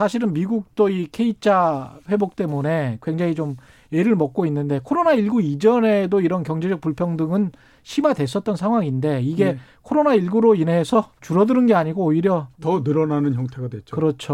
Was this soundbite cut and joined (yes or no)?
yes